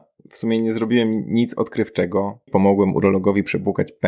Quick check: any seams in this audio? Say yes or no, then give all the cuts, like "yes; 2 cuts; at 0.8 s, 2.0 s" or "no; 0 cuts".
yes; 1 cut; at 2.5 s